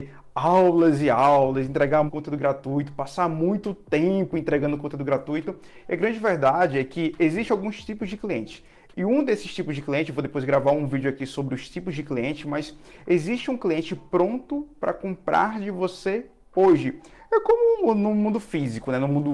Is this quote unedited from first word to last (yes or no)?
no